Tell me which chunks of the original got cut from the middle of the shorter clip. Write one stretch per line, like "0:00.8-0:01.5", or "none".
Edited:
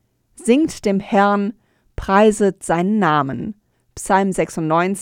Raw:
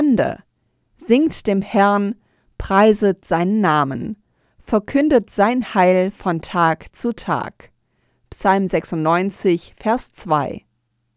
0:04.3-0:08.1